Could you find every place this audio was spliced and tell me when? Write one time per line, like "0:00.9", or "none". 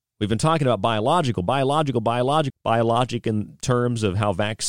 0:02.5